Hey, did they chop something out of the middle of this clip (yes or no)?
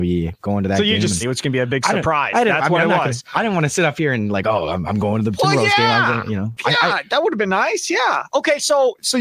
yes